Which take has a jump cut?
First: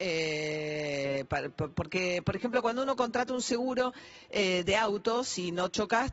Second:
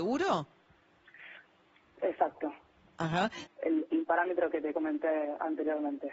second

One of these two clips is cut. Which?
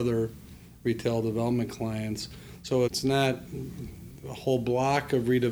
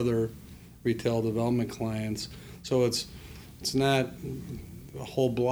first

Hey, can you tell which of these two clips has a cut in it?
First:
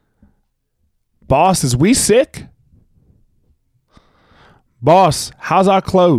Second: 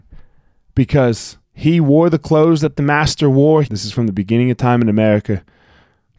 second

